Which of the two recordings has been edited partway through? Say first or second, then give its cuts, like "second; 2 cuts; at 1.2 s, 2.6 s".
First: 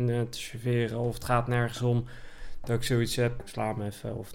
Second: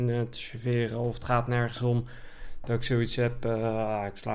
first; 1 cut; at 3.4 s